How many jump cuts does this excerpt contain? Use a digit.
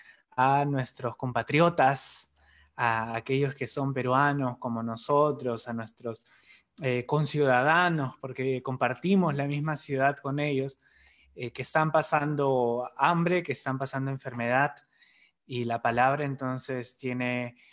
0